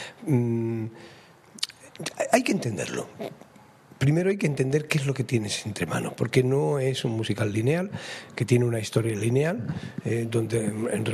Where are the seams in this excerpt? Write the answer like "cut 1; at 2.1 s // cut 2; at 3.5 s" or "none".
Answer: none